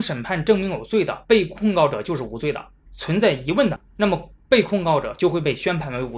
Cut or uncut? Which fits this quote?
cut